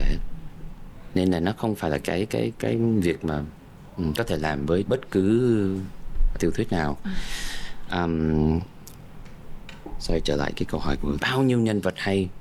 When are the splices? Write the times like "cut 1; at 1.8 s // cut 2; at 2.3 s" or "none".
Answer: cut 1; at 6.4 s // cut 2; at 11.2 s